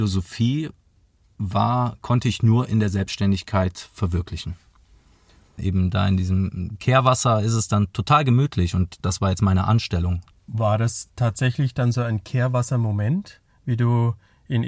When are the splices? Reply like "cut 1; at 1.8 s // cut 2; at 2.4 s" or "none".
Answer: cut 1; at 5.6 s // cut 2; at 10.3 s